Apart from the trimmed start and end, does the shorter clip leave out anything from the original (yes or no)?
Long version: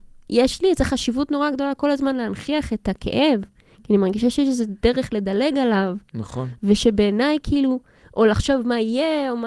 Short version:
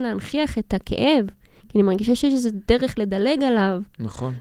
no